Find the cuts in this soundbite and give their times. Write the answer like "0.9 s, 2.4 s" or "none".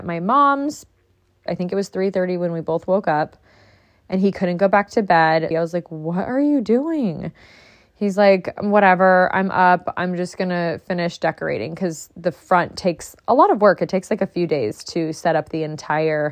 1.5 s, 5.5 s